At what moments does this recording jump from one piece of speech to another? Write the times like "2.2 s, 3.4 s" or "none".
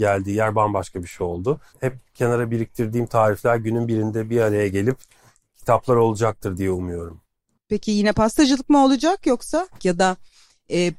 1.7 s, 9.8 s